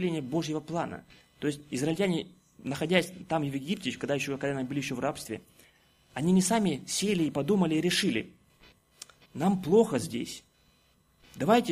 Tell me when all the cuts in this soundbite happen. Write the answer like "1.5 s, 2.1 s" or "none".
none